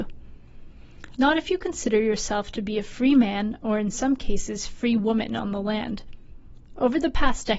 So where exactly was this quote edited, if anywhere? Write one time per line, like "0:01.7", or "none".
0:01.2

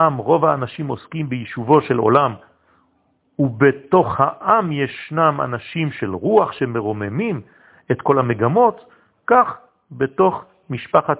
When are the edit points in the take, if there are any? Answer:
none

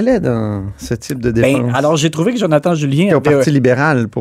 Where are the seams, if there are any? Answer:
none

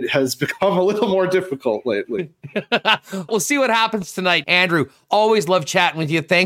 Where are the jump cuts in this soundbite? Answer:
0:03.3
0:04.4

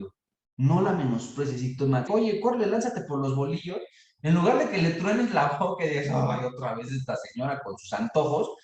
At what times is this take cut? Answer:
0:02.1

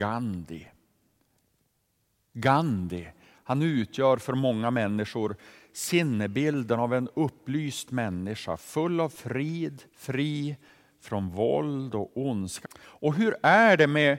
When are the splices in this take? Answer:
0:09.9
0:12.6

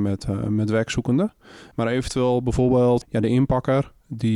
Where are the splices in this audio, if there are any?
0:01.7
0:03.0

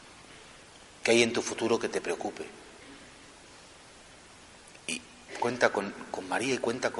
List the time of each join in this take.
0:01.0

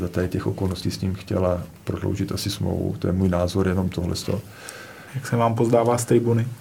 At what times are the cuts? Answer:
0:05.1

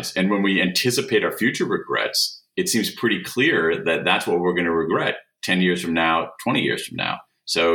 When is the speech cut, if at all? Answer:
none

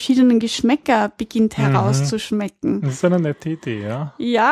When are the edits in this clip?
none

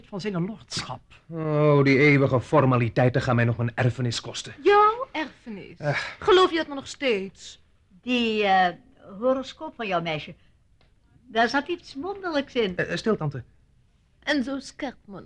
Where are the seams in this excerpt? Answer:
0:14.2

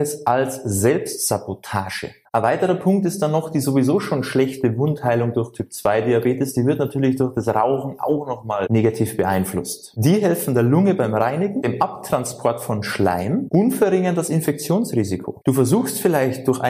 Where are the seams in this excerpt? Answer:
0:02.2
0:10.0
0:15.4

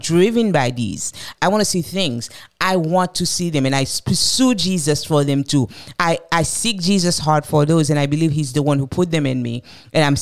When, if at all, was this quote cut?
0:01.4

